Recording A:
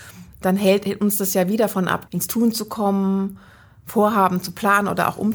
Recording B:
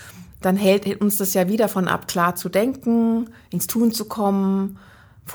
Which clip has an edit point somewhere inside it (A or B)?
A